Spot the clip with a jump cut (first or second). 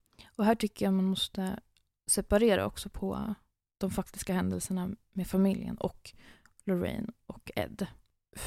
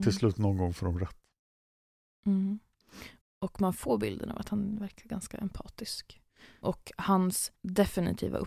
second